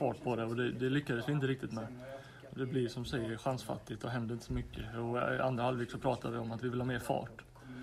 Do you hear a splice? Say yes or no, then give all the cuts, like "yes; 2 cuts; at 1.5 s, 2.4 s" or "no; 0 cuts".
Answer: no; 0 cuts